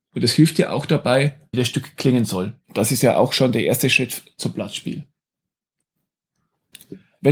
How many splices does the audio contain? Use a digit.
2